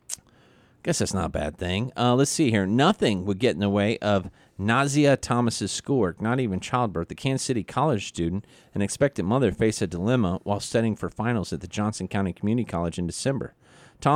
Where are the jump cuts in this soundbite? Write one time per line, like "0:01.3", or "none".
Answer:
none